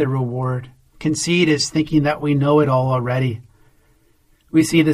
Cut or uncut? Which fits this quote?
cut